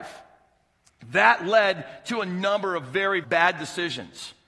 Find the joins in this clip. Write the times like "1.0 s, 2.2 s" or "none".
3.2 s